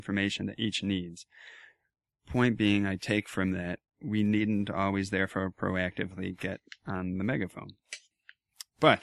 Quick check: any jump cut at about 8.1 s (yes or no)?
yes